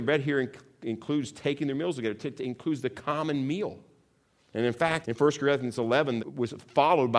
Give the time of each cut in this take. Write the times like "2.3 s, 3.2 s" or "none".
5.0 s, 6.2 s